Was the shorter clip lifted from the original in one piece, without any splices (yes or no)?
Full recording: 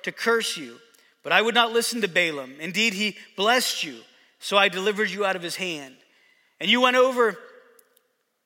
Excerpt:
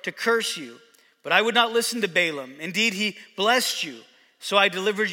yes